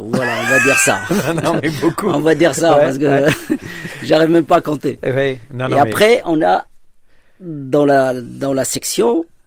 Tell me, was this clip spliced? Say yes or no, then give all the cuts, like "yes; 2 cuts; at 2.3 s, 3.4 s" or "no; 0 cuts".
no; 0 cuts